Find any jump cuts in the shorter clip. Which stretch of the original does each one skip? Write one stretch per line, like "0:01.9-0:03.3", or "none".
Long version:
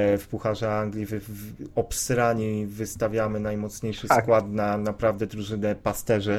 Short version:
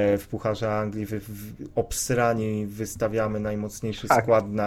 none